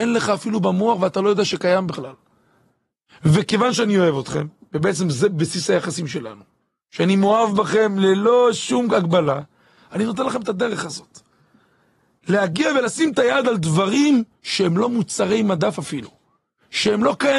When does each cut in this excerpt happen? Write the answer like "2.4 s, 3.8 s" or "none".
none